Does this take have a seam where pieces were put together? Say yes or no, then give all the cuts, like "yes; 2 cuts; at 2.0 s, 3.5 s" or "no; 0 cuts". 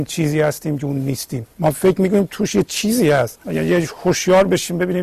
yes; 2 cuts; at 1.5 s, 3.4 s